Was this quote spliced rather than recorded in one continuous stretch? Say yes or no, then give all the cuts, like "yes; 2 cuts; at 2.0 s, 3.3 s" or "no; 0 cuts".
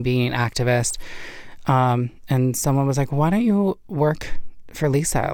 no; 0 cuts